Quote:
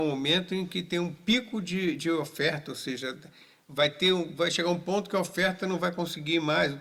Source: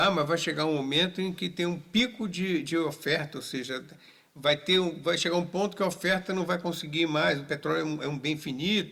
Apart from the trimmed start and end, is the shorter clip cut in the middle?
no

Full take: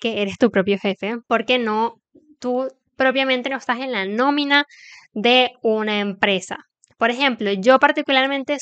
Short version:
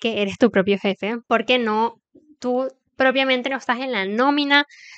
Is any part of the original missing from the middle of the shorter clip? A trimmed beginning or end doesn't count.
no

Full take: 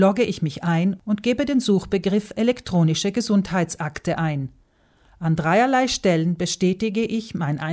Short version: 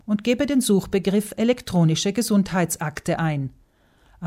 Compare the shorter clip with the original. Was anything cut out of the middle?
no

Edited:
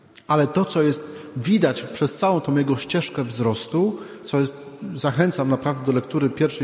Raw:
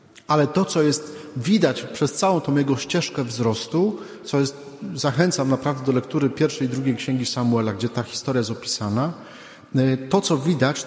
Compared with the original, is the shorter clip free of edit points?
yes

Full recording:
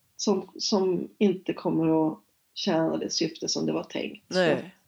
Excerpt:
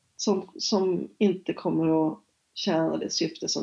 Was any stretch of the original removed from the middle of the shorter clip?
no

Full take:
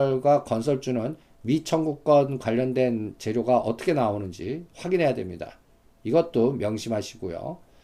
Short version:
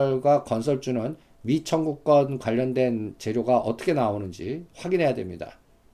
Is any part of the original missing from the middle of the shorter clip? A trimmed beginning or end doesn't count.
no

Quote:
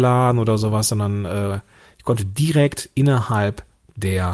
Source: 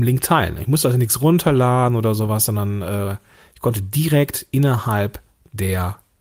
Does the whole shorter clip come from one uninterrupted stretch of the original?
yes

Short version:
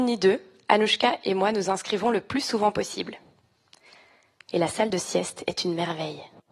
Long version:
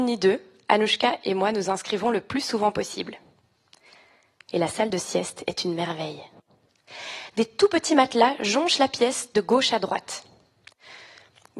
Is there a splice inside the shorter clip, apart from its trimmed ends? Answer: no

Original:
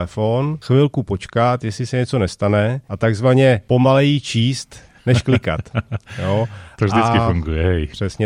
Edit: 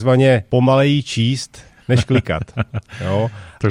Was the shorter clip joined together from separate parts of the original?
no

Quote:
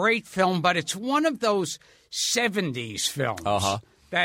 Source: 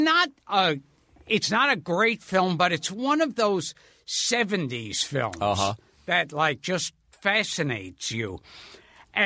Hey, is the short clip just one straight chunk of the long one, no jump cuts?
yes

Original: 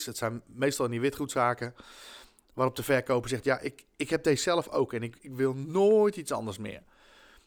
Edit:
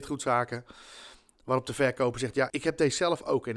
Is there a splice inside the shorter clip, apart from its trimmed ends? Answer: yes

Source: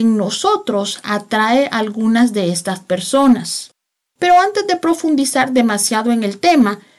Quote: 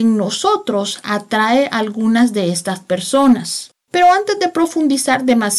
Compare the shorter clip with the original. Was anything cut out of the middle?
yes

